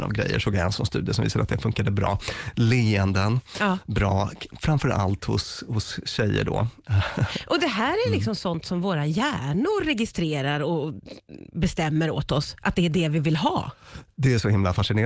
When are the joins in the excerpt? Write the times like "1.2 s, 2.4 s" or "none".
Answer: none